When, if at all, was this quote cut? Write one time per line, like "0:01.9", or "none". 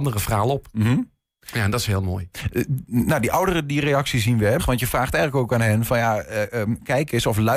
0:04.6